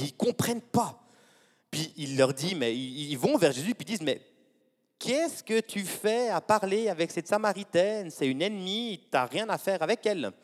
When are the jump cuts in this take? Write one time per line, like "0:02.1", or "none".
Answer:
none